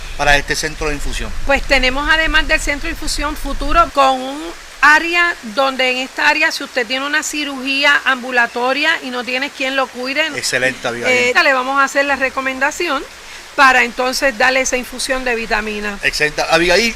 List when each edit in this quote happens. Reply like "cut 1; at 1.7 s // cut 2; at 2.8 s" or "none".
cut 1; at 3.9 s // cut 2; at 10.3 s // cut 3; at 11.3 s